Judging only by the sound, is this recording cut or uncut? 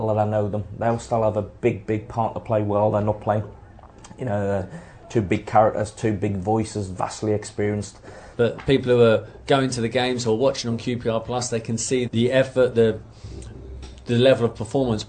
cut